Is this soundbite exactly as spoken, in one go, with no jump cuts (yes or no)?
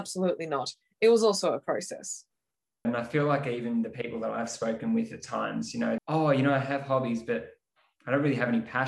no